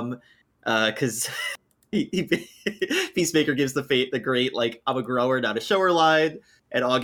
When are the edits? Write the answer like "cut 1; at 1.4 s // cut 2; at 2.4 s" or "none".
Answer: none